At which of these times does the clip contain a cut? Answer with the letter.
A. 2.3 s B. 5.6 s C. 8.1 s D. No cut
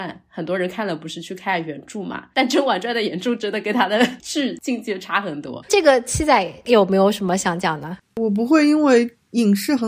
B